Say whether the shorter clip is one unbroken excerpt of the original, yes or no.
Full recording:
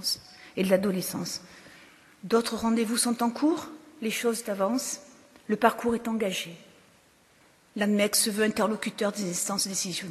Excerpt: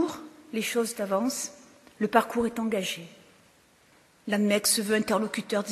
yes